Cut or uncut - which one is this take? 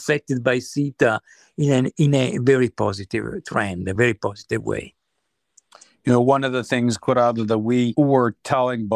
uncut